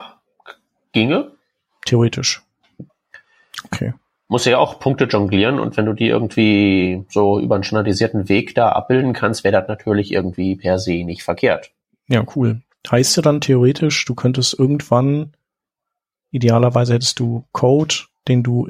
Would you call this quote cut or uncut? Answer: cut